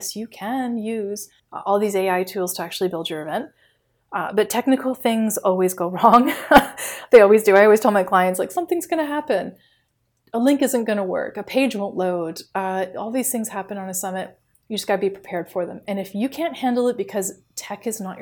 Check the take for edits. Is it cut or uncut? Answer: cut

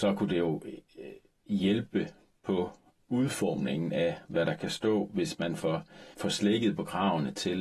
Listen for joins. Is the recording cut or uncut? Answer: cut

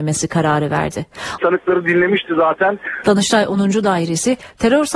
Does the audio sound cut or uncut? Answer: cut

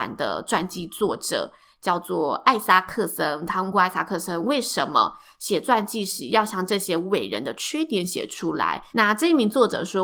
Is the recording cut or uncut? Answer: cut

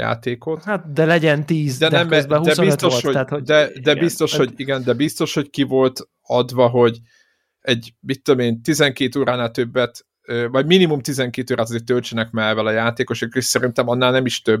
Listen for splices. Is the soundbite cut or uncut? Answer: uncut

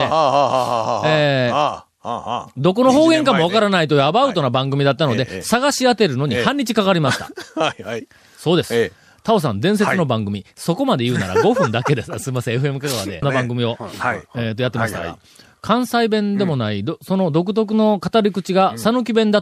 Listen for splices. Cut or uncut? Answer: cut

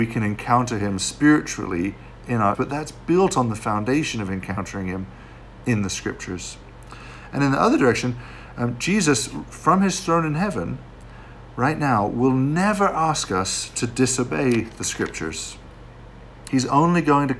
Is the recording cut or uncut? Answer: cut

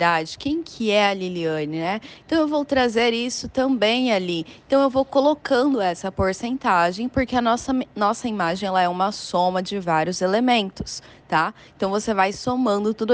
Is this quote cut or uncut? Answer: uncut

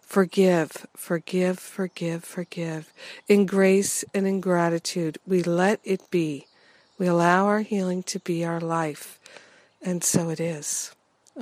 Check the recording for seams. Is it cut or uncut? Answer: uncut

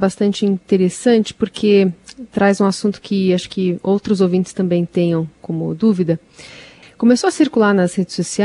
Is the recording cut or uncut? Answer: cut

